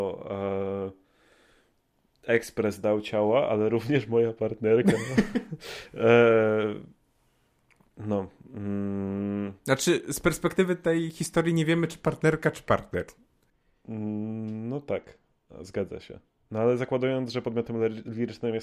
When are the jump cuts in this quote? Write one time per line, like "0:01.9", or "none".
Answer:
none